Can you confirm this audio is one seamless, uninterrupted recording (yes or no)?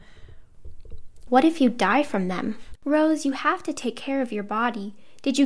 no